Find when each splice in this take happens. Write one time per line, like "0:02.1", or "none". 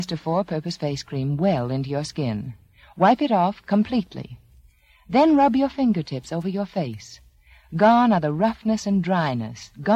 none